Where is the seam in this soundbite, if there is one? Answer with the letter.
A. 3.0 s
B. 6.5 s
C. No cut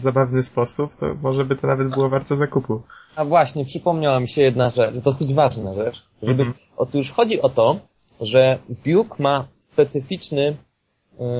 B